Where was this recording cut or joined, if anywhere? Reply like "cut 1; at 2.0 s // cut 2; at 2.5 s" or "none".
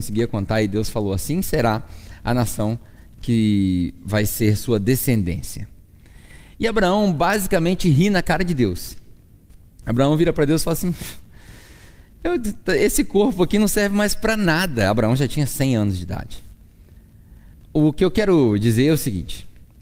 none